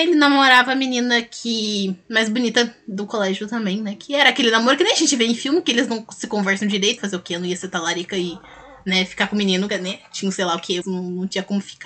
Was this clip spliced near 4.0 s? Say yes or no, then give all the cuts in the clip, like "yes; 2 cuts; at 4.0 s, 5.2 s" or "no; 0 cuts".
no; 3 cuts; at 7.0 s, 9.7 s, 10.8 s